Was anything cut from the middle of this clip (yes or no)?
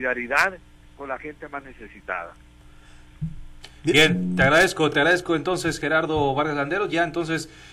no